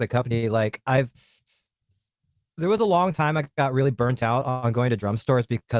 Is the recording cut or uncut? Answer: uncut